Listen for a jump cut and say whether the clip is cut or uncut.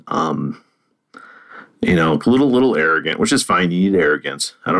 uncut